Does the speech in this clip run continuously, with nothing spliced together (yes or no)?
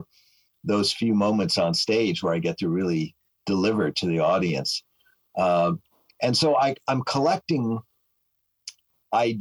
yes